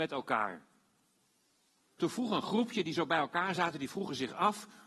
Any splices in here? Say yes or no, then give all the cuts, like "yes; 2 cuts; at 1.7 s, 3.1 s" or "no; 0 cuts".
yes; 1 cut; at 1.9 s